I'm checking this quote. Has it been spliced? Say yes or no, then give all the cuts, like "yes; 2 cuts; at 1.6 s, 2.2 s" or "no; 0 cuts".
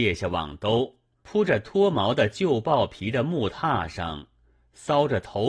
yes; 1 cut; at 1.2 s